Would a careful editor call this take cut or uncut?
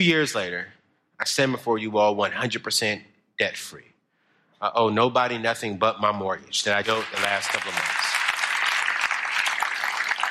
cut